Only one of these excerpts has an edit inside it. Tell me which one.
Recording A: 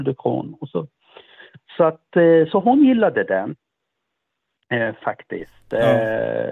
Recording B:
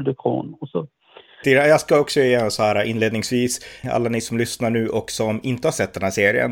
B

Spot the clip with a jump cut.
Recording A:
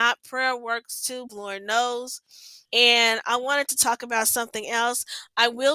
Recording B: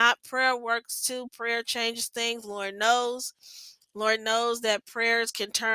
A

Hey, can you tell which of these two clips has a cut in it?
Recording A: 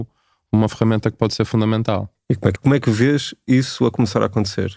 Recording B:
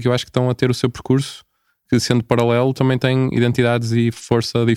A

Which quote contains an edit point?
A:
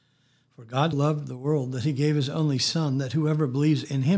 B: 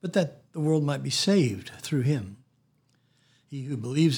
A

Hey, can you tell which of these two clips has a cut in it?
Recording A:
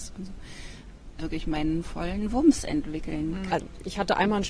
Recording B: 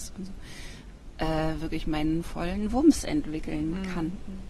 A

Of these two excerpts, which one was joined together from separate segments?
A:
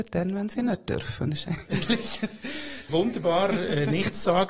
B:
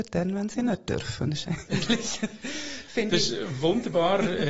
A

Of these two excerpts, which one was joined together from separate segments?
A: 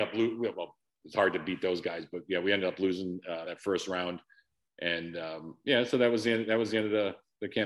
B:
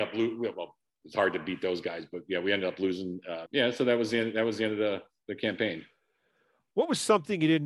B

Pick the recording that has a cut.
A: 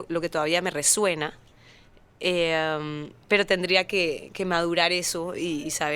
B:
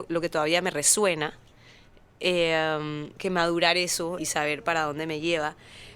B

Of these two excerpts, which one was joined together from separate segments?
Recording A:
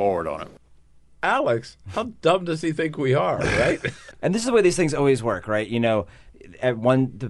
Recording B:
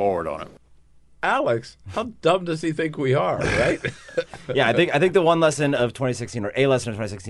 A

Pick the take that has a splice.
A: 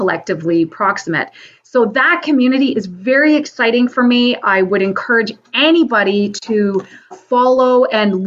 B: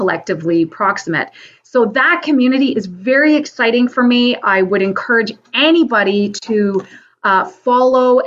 A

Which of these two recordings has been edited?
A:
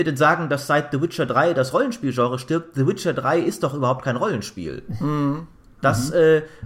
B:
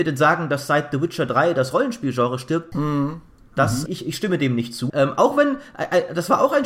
B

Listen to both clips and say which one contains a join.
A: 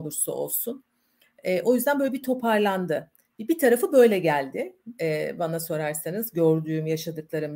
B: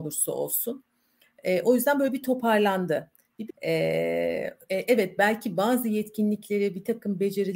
B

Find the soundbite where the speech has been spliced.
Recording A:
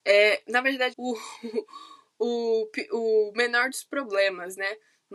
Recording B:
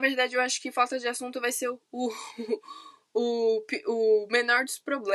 A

